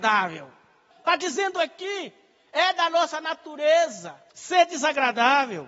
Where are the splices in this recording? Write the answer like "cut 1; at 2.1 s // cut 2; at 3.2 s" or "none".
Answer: cut 1; at 0.9 s // cut 2; at 4.3 s